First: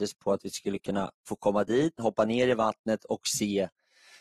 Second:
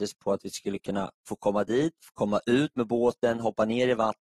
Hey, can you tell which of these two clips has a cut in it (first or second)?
first